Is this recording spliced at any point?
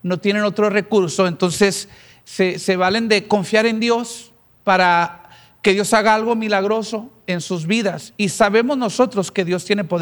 no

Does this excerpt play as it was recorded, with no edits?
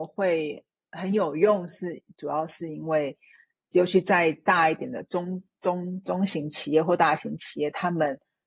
yes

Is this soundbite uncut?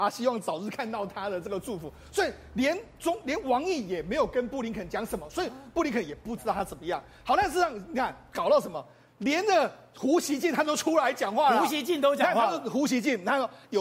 yes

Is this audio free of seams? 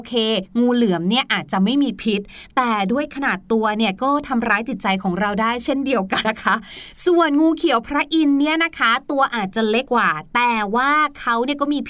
no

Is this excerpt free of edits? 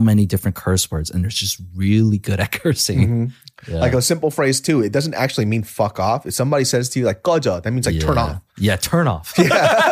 yes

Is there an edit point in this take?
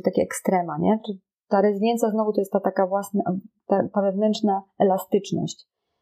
no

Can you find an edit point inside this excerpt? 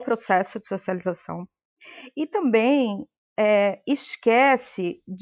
no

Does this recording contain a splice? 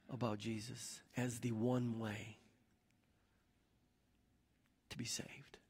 yes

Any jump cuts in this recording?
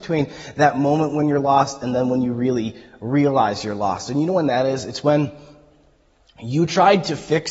no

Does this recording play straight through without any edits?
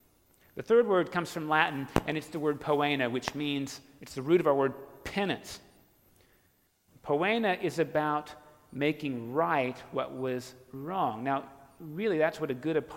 yes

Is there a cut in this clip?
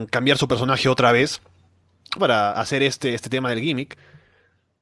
yes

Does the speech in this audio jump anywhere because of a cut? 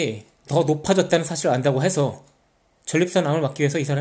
no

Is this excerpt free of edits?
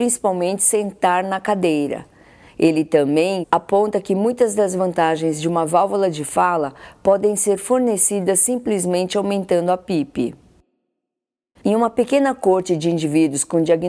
no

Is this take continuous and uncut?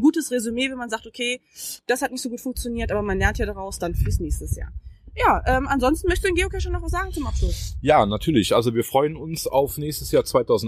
yes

